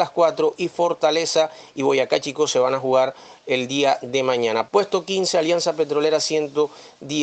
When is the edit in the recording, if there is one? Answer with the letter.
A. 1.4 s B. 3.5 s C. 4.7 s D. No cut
C